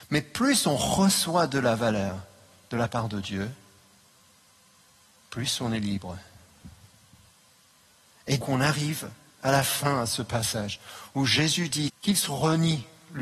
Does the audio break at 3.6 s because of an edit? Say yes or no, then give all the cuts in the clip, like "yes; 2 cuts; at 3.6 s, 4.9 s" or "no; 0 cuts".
no; 2 cuts; at 8.4 s, 11.9 s